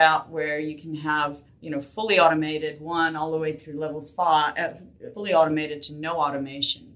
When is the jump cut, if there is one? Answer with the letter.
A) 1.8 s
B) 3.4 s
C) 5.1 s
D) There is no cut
C